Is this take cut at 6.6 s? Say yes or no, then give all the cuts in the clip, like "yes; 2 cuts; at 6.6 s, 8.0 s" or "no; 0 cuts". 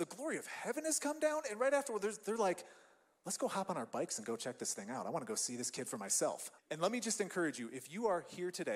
yes; 1 cut; at 6.6 s